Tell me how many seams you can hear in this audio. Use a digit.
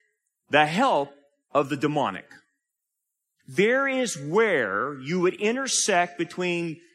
1